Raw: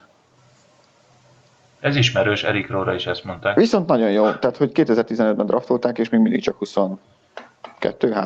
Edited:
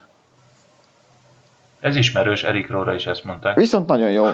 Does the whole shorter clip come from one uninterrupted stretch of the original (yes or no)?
yes